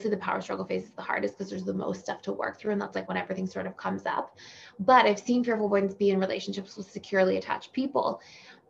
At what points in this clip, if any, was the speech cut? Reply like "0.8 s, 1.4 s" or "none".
none